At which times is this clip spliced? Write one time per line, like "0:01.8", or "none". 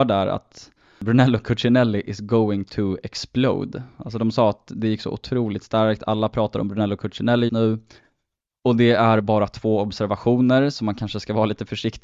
0:07.5